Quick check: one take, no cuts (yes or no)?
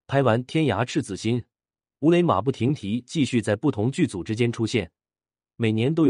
yes